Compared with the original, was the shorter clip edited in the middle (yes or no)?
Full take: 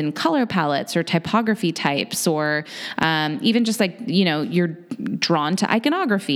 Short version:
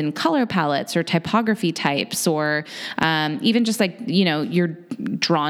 no